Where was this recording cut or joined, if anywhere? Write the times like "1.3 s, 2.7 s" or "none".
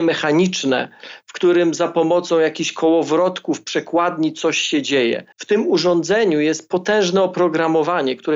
5.3 s